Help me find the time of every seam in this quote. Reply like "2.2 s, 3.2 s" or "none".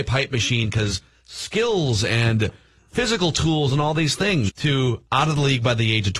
4.5 s